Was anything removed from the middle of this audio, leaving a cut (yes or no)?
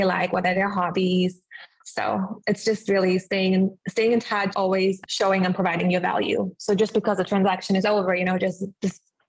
yes